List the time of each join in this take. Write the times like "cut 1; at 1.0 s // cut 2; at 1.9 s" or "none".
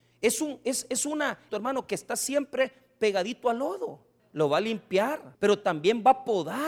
cut 1; at 1.5 s // cut 2; at 4.2 s // cut 3; at 5.3 s